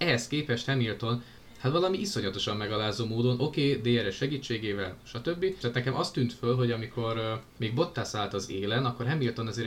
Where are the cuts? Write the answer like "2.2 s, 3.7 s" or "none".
5.6 s